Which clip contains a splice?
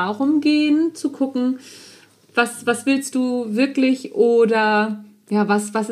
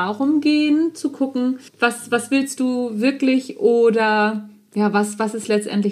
second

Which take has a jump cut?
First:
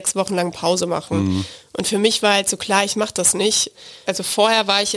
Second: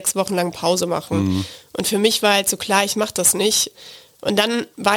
first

